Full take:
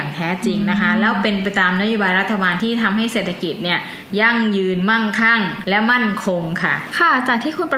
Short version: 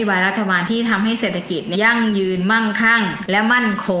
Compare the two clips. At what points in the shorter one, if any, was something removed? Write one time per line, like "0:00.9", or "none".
0:01.7